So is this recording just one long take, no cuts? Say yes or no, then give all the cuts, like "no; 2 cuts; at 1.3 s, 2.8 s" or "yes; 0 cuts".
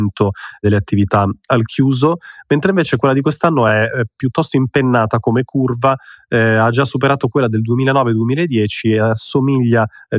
yes; 0 cuts